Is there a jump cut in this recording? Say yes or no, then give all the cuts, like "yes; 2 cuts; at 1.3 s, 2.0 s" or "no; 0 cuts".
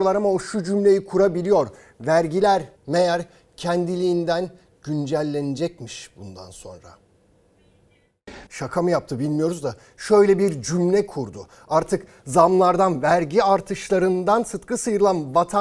yes; 2 cuts; at 2.8 s, 8.5 s